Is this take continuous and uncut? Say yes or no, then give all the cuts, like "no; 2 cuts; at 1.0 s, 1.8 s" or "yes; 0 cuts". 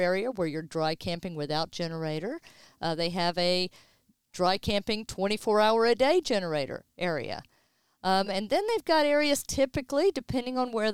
yes; 0 cuts